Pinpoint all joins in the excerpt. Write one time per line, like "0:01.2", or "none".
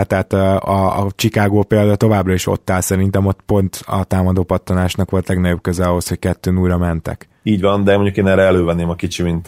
0:07.4